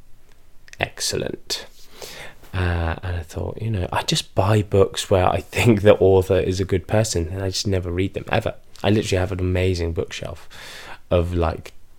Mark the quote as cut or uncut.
uncut